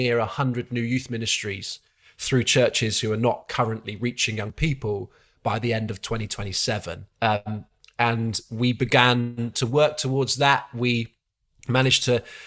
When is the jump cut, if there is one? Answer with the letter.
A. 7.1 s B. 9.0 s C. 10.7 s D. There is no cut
A